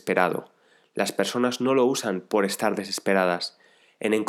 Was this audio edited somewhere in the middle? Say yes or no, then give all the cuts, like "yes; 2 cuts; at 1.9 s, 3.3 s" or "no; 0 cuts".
no; 0 cuts